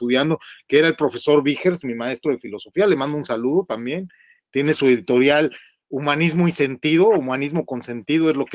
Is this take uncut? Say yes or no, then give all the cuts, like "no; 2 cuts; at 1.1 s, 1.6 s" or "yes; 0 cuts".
yes; 0 cuts